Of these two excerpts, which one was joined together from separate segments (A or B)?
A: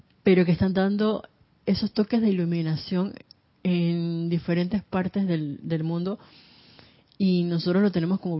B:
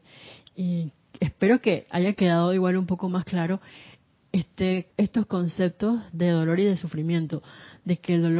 B